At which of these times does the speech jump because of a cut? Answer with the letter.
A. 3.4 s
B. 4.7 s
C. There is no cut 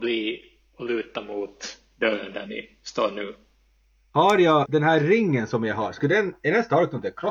B